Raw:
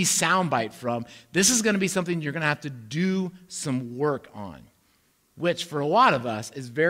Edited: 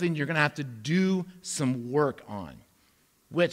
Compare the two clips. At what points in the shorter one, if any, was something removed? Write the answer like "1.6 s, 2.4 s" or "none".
none